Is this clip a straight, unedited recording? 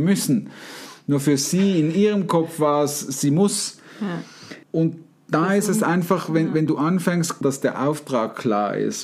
no; 2 cuts; at 4.6 s, 7.4 s

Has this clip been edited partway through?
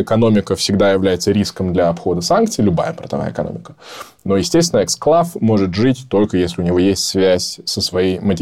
no; 0 cuts

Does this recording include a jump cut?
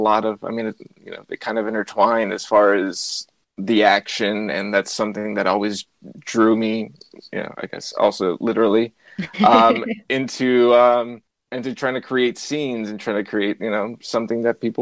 no; 0 cuts

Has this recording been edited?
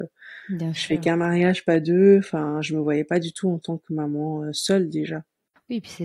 no; 0 cuts

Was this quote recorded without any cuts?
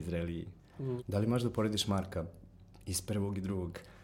no; 1 cut; at 1.0 s

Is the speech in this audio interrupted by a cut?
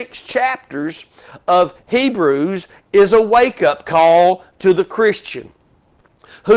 no; 0 cuts

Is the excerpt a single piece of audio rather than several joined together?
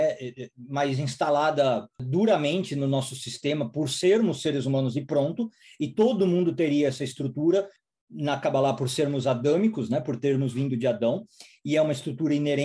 yes; 0 cuts

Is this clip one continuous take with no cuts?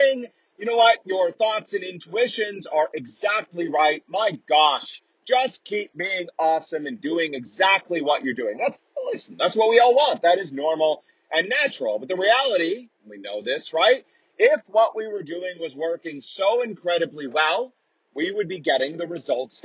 yes; 0 cuts

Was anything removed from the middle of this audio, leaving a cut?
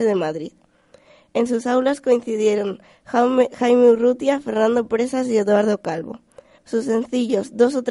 yes; 1 cut; at 6.6 s

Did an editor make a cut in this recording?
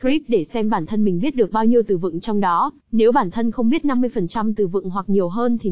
yes; 1 cut; at 2.8 s

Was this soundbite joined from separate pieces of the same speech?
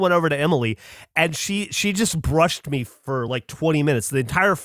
no; 0 cuts

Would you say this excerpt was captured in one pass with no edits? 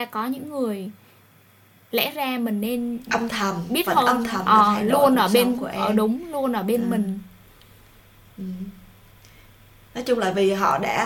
yes; 0 cuts

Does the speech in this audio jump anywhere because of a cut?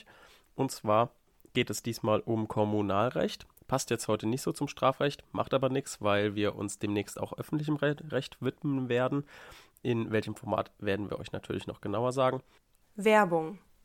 yes; 1 cut; at 12.8 s

